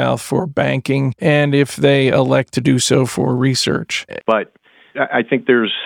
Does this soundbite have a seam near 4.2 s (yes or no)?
yes